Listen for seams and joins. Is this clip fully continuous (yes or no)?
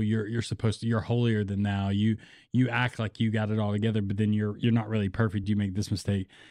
yes